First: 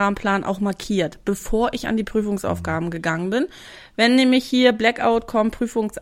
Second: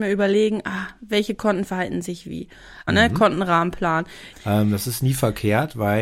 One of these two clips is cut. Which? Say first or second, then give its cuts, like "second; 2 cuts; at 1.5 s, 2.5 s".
second; 2 cuts; at 2.9 s, 4.3 s